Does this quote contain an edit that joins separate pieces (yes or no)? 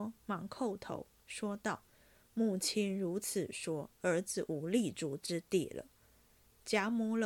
no